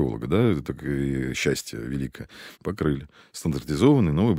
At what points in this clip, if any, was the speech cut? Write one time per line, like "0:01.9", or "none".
0:02.5